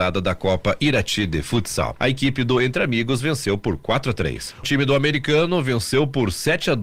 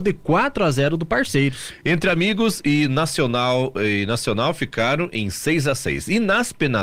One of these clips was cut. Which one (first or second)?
first